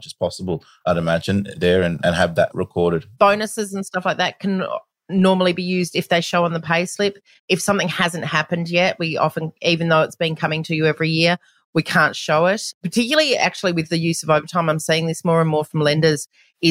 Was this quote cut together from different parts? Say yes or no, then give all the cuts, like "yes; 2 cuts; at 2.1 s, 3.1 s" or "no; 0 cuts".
no; 0 cuts